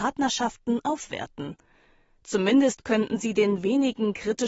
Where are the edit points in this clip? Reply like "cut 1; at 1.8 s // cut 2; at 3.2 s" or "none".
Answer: none